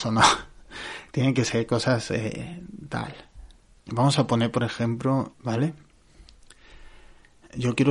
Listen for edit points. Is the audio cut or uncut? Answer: cut